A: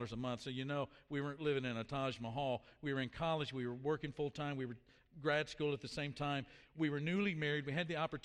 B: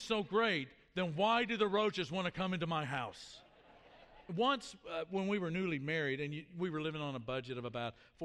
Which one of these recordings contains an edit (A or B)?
B